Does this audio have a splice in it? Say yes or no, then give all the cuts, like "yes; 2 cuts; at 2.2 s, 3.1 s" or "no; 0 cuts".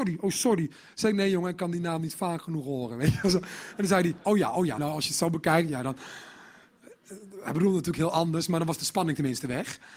yes; 1 cut; at 4.8 s